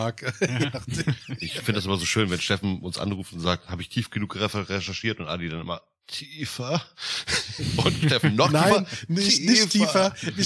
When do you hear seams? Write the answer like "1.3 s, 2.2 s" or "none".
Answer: none